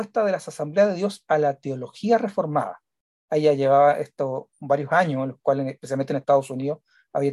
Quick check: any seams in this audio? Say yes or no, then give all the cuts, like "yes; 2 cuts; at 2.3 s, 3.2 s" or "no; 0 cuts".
no; 0 cuts